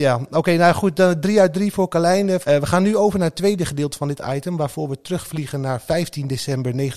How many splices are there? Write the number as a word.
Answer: one